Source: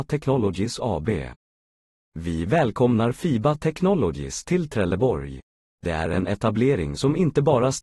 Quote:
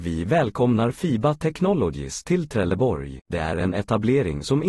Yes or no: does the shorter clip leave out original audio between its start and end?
yes